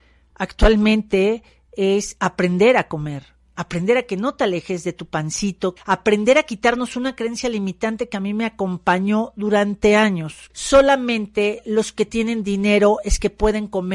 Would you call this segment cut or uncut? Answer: cut